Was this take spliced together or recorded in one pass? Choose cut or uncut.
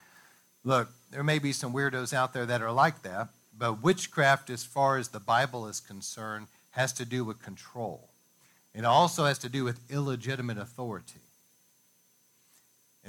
uncut